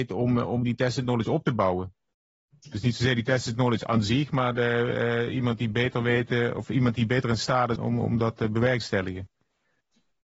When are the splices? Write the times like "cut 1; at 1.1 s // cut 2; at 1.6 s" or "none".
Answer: cut 1; at 7.8 s